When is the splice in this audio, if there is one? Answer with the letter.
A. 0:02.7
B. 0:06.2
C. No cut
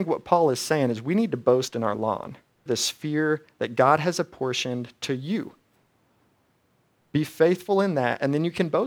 A